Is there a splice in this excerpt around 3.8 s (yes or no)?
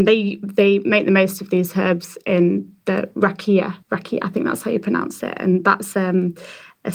yes